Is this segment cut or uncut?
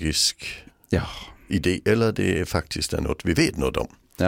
uncut